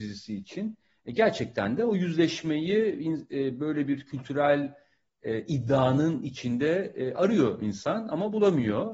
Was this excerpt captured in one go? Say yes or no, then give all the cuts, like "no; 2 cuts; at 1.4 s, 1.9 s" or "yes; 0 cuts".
yes; 0 cuts